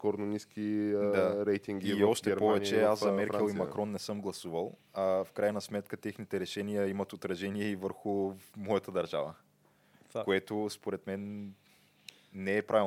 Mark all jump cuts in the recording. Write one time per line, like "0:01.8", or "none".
none